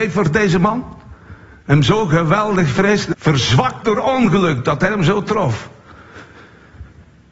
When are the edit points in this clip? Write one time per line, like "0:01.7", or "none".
0:03.1